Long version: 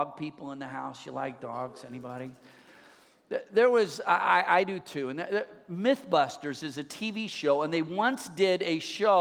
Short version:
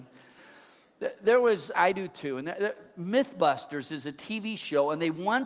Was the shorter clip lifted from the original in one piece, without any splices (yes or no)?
no